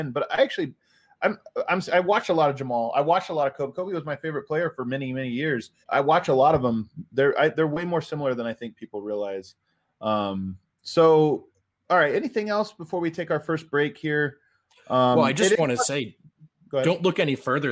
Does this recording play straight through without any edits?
no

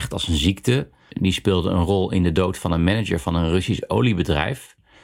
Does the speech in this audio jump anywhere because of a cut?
yes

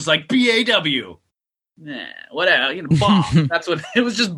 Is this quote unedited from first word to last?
yes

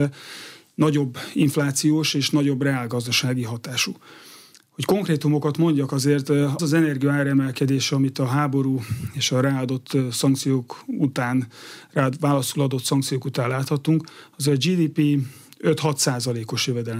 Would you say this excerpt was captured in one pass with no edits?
no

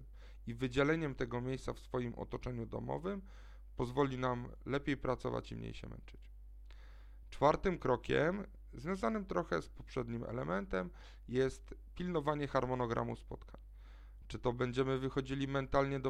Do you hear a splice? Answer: yes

